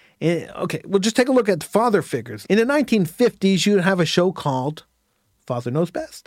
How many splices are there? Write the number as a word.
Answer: one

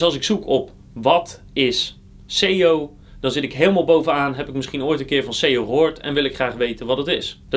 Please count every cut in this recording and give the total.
zero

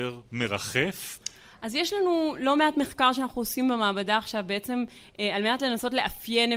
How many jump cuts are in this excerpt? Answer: zero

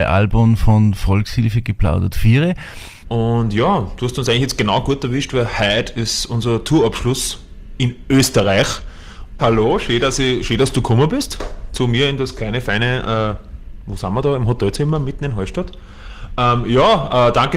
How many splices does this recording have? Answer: two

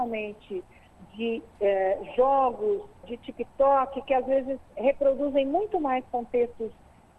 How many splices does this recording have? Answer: one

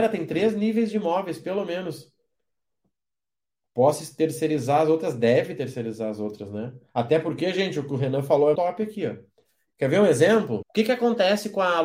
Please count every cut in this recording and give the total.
two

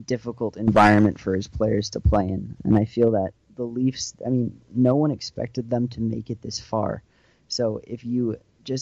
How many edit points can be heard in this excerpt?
one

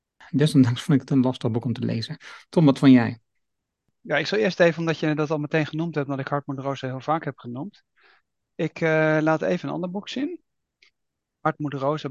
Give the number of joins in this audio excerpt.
one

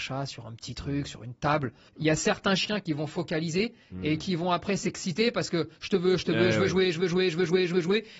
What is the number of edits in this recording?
two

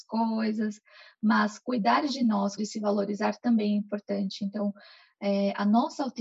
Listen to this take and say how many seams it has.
one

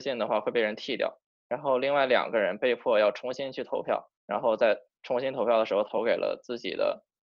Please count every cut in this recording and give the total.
two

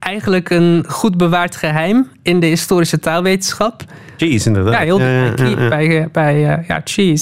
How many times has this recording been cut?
one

